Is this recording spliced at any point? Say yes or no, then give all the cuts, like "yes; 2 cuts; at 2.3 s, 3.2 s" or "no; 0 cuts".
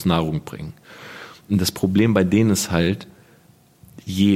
no; 0 cuts